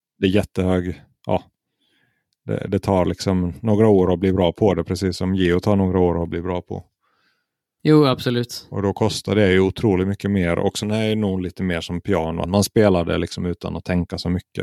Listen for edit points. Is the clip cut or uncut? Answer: cut